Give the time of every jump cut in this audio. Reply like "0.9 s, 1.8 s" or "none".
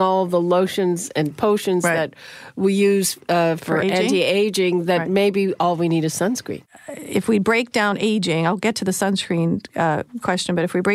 none